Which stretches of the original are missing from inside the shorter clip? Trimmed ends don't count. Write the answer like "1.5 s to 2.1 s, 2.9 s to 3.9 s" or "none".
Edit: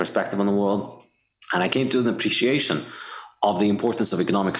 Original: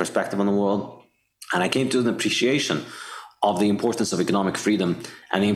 none